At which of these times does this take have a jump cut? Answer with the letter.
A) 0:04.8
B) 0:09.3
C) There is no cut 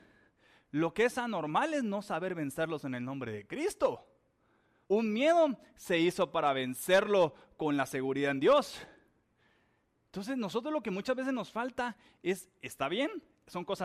A